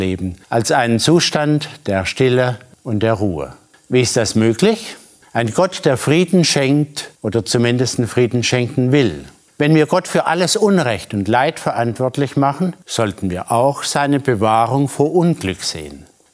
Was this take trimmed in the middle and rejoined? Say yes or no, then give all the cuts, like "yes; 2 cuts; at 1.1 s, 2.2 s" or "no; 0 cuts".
yes; 1 cut; at 5.2 s